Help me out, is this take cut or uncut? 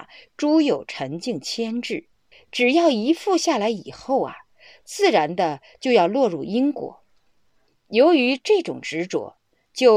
cut